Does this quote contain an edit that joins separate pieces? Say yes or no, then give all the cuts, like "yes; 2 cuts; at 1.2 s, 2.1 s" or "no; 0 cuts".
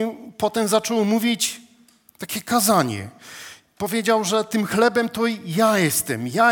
no; 0 cuts